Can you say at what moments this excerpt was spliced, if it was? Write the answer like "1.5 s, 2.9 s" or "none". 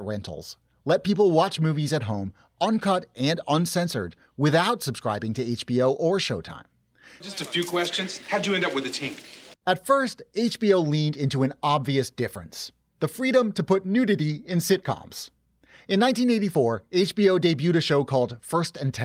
7.2 s, 9.5 s